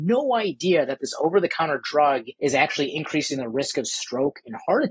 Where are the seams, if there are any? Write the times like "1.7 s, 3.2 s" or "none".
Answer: 2.4 s